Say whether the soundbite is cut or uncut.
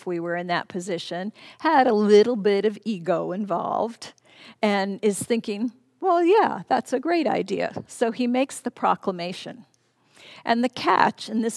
uncut